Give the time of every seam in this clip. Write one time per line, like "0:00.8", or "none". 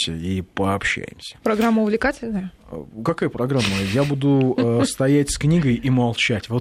none